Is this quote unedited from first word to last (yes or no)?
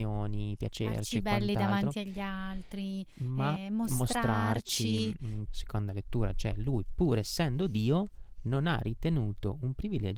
no